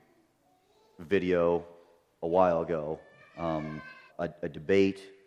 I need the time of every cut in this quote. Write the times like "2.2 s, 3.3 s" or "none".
4.1 s